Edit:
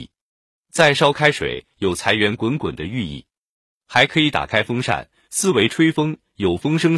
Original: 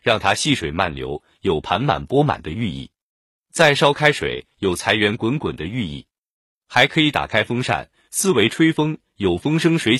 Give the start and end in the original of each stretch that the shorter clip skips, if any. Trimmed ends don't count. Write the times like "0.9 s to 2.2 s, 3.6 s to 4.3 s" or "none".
none